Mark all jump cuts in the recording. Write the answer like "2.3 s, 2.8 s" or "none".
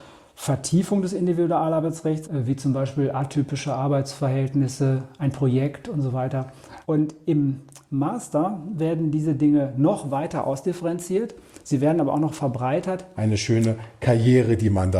2.2 s, 6.8 s, 13.1 s